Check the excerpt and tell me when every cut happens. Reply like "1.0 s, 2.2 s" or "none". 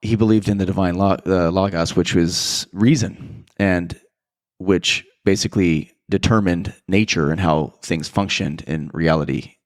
none